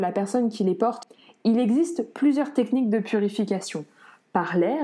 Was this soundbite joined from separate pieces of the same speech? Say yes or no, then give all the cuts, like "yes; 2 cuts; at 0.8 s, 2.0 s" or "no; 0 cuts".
no; 0 cuts